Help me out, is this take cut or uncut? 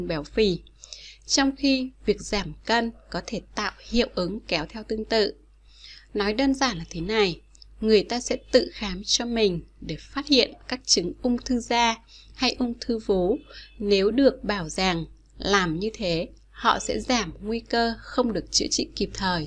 uncut